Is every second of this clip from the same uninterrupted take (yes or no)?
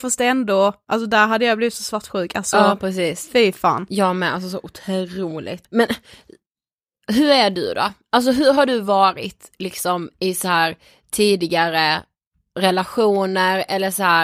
no